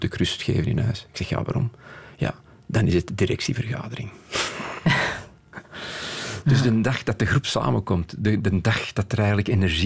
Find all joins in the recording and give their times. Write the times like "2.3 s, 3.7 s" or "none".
none